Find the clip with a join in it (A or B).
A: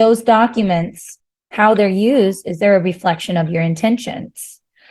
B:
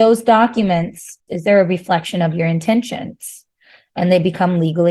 B